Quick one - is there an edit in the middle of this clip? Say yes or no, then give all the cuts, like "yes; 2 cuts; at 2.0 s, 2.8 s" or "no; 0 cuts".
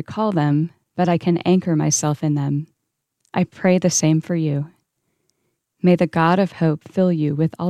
no; 0 cuts